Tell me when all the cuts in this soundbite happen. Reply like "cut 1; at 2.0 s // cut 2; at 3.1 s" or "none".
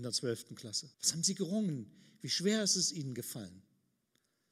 cut 1; at 0.9 s